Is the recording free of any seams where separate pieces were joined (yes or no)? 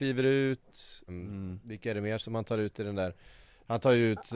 no